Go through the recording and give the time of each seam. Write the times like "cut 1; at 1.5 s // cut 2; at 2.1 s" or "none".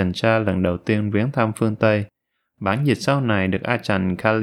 cut 1; at 2.6 s